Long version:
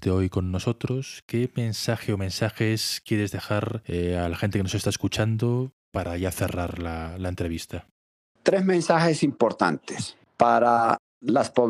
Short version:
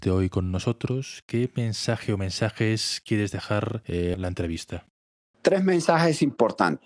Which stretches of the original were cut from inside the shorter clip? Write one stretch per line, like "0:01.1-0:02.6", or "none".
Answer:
0:04.1-0:07.1